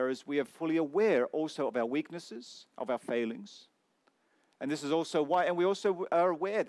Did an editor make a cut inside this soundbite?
no; 0 cuts

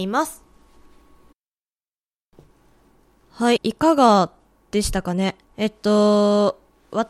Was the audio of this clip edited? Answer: yes; 2 cuts; at 3.6 s, 5.4 s

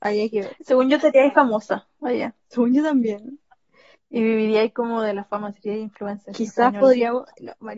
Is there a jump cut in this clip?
no; 0 cuts

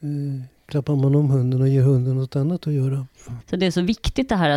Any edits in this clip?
yes; 1 cut; at 3.4 s

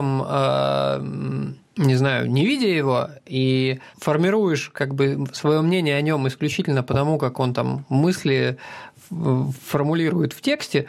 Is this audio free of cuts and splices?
yes; 0 cuts

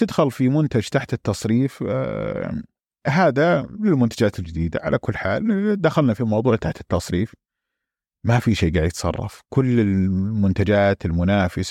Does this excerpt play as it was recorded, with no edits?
yes; 0 cuts

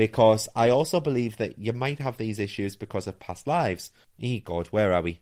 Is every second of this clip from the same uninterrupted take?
no; 1 cut; at 4.1 s

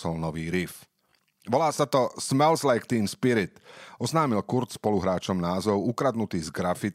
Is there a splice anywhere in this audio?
no; 0 cuts

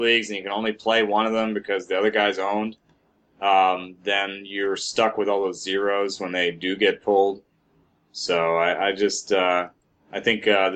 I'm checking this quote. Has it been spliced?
no; 0 cuts

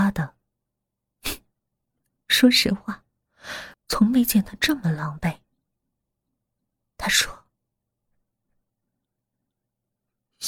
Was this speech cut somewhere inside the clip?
yes; 1 cut; at 3.7 s

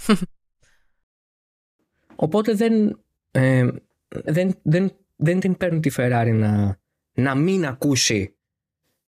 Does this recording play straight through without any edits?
no; 1 cut; at 4.3 s

